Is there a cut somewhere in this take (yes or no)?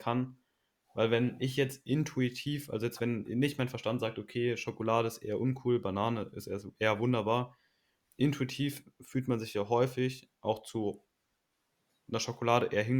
no